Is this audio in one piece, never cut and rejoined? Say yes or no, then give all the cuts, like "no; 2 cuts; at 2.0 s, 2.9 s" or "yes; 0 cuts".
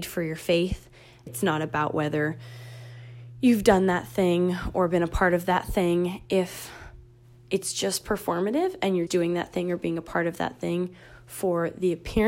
no; 2 cuts; at 1.3 s, 9.1 s